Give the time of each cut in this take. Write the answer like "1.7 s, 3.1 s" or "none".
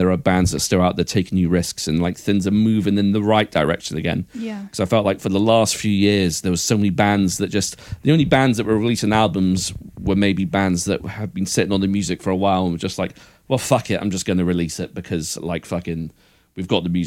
none

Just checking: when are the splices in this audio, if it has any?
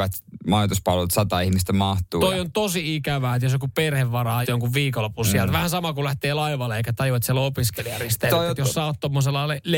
4.4 s

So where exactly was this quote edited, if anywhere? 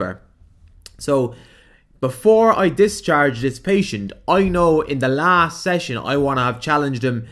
none

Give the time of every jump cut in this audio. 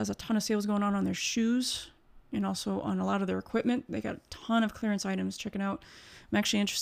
none

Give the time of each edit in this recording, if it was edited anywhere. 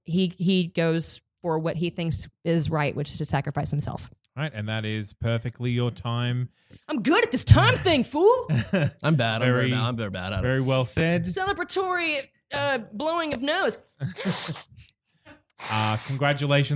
none

